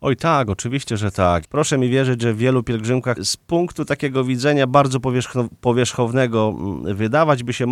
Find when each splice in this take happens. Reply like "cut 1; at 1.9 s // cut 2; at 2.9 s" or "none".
cut 1; at 1.4 s // cut 2; at 3.2 s